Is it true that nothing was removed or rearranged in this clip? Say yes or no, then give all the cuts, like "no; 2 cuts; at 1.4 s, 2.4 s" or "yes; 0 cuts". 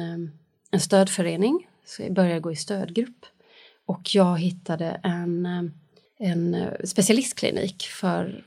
yes; 0 cuts